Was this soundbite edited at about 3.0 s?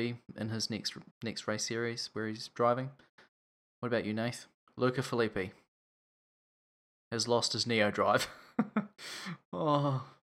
no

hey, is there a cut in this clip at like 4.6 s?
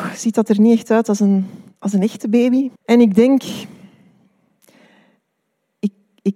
no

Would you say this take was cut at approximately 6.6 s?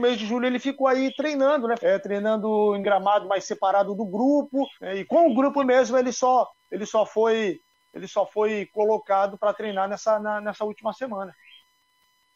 no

